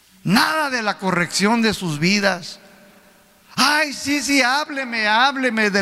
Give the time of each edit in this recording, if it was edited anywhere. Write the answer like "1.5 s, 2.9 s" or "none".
none

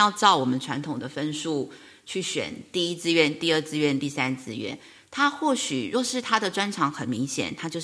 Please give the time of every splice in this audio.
none

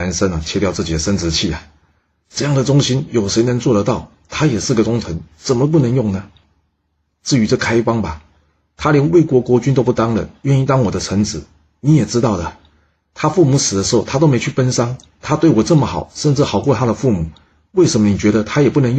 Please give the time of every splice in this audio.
none

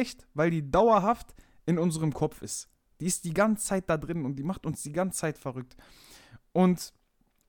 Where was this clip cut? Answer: none

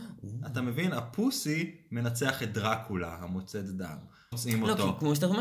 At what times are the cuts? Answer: 4.3 s

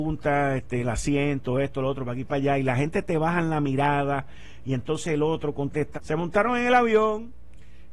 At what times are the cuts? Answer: 5.9 s

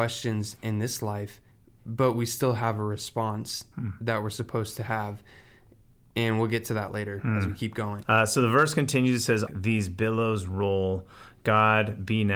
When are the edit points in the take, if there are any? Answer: 8.0 s, 9.5 s

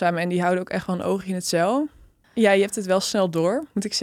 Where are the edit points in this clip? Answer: 2.2 s

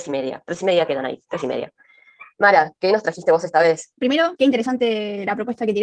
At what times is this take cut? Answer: 3.9 s

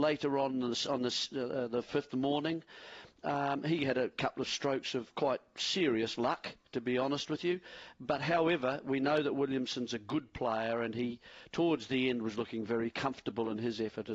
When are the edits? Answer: none

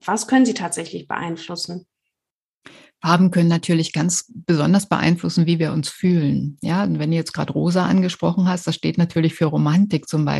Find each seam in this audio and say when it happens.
none

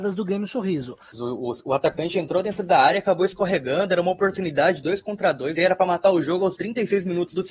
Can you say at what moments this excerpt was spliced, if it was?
1.1 s, 5.6 s

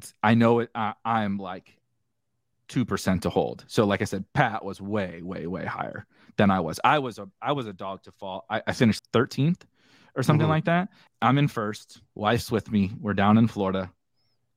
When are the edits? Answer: 9.0 s, 11.1 s

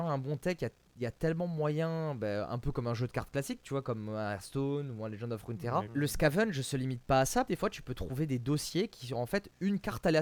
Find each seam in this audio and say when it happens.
5.9 s, 7.5 s

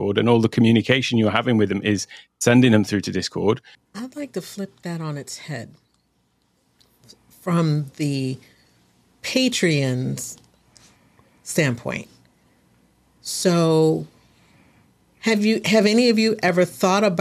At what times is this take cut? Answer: 3.7 s

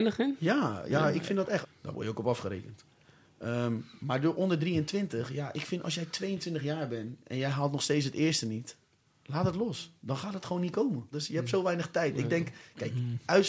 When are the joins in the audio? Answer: 1.6 s, 11.1 s

